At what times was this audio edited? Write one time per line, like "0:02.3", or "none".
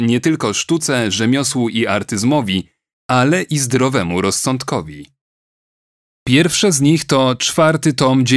none